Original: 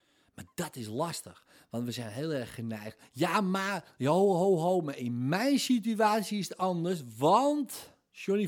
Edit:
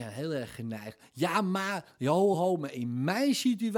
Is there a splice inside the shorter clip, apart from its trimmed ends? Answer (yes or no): yes